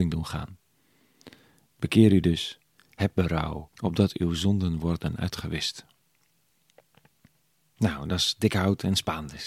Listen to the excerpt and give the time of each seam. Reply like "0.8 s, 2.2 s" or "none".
3.7 s